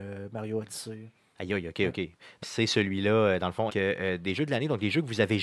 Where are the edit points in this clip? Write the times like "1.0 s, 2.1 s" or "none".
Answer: 2.4 s, 3.7 s